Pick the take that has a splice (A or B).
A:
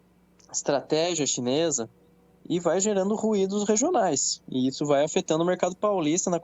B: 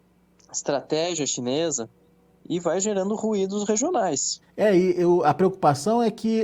B